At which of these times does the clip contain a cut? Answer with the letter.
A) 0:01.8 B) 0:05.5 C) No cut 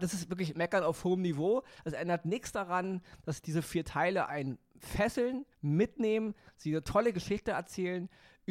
B